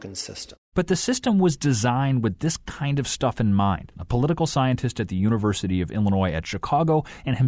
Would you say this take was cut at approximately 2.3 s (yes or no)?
no